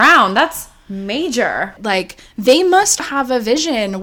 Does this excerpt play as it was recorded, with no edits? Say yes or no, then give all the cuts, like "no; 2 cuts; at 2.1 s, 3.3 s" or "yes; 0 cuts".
no; 2 cuts; at 1.8 s, 3.0 s